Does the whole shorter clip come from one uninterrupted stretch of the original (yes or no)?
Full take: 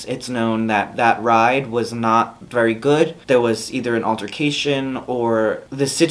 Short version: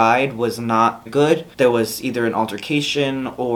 no